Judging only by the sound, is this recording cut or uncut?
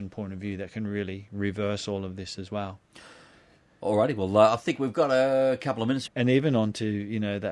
cut